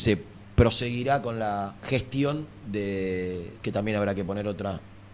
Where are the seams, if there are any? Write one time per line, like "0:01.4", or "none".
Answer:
0:01.8
0:03.6